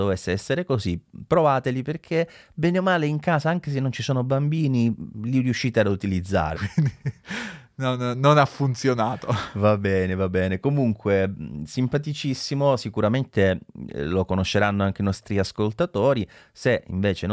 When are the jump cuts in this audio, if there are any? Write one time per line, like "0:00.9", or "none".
0:06.6